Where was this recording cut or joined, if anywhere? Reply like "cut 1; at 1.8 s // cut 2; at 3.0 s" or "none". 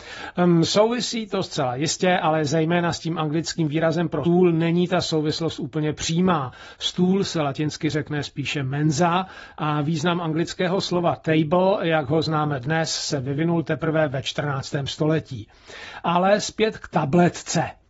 cut 1; at 4.2 s

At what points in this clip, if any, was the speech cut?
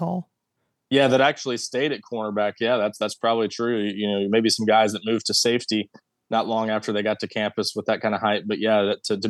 none

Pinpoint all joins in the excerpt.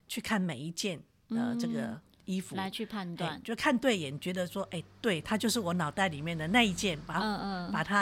none

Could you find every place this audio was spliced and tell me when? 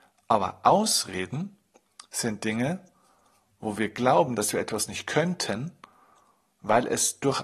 none

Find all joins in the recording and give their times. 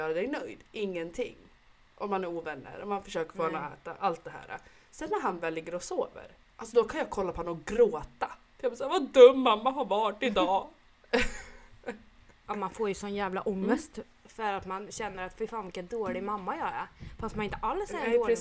none

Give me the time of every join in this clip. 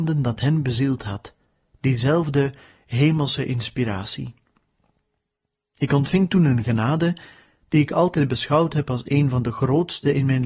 none

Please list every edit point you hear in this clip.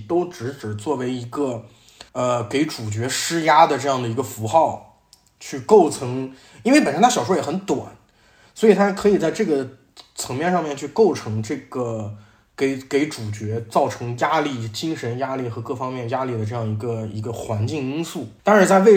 cut 1; at 2.1 s

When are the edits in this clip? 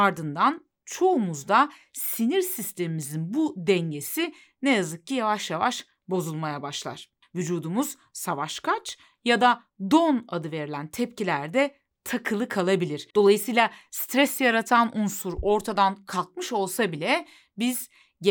none

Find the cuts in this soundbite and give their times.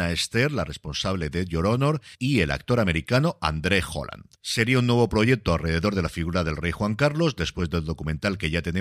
cut 1; at 4.3 s

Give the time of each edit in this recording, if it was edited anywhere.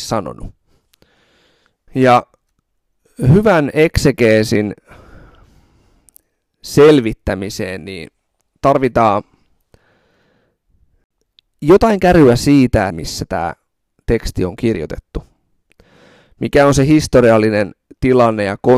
cut 1; at 1.9 s // cut 2; at 12.9 s

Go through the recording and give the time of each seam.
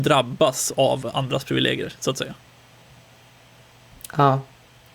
none

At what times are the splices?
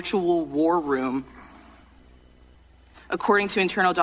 cut 1; at 2.9 s

